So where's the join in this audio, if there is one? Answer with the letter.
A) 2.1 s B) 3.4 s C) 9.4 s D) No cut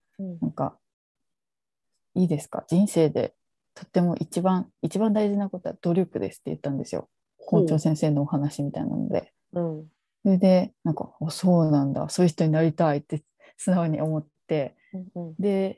D